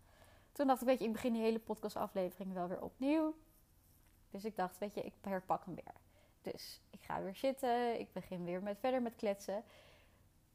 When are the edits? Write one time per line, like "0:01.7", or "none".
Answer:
0:04.3